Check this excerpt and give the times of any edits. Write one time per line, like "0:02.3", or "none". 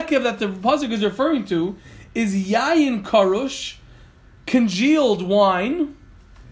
none